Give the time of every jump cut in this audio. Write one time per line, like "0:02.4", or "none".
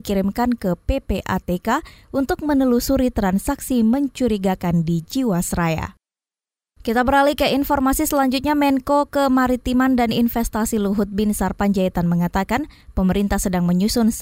none